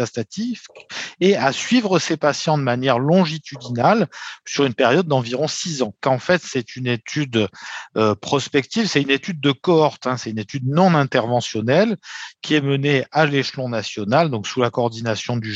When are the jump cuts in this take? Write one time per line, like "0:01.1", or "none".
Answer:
0:06.0